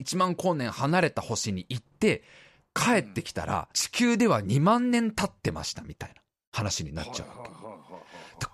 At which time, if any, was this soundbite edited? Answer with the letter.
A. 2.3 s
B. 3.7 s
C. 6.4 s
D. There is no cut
B